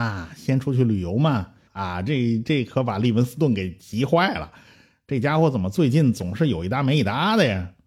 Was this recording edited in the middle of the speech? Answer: yes; 1 cut; at 1.7 s

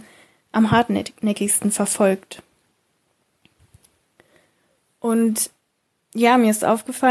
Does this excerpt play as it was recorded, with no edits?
yes; 0 cuts

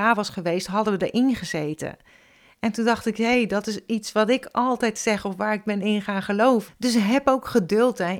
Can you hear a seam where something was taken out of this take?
yes; 1 cut; at 6.7 s

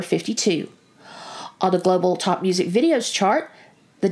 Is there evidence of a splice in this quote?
no; 0 cuts

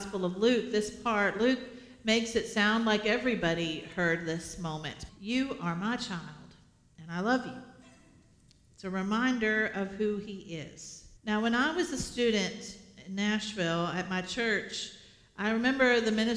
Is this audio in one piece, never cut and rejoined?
no; 2 cuts; at 5.1 s, 11.2 s

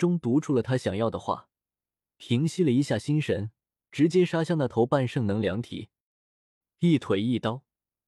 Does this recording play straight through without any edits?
yes; 0 cuts

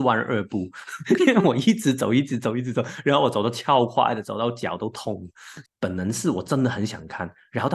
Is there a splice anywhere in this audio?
yes; 1 cut; at 5.6 s

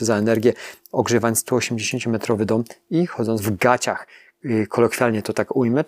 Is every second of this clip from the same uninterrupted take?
yes; 0 cuts

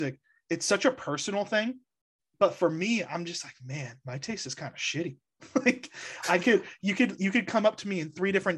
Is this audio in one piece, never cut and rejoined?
yes; 0 cuts

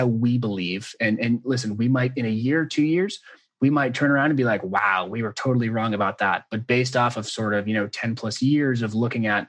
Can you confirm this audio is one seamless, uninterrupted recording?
yes; 0 cuts

